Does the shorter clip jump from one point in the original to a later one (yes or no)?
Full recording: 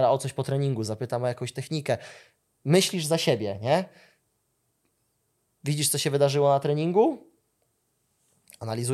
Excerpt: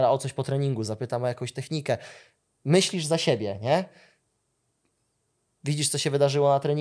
no